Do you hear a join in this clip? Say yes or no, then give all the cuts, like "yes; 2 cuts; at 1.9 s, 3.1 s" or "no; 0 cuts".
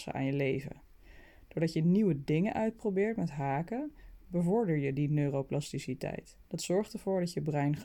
yes; 2 cuts; at 4.2 s, 6.5 s